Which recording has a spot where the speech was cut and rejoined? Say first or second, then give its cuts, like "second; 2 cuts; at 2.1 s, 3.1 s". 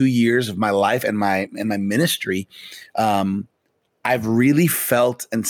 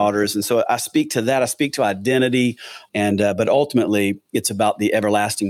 second; 1 cut; at 2.9 s